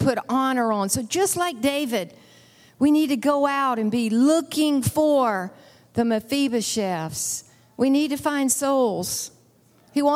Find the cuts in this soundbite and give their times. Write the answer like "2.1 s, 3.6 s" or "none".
none